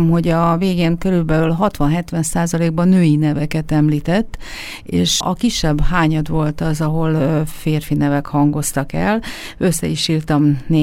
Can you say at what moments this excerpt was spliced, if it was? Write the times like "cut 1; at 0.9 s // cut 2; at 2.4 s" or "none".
cut 1; at 5.2 s